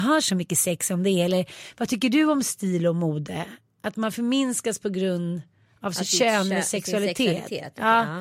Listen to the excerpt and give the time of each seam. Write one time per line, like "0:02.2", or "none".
none